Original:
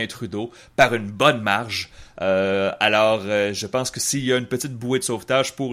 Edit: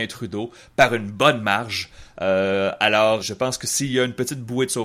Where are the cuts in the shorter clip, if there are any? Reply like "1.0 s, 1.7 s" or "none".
3.2 s